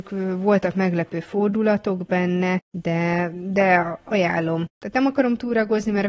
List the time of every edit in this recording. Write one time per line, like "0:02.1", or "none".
none